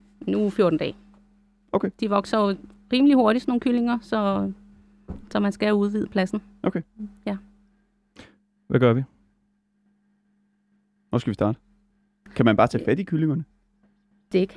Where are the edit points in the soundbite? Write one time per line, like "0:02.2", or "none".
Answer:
none